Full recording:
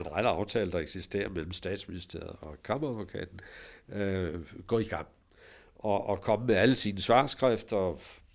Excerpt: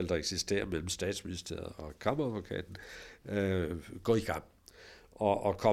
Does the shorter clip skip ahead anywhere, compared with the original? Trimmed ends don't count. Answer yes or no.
no